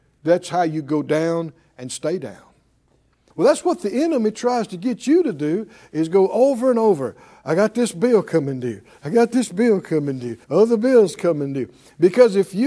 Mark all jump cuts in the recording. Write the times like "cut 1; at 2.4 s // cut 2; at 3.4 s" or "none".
cut 1; at 3.3 s // cut 2; at 10.4 s